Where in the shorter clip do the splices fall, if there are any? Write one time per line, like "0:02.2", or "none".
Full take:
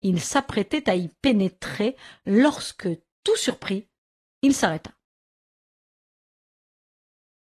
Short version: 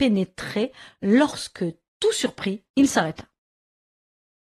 0:02.7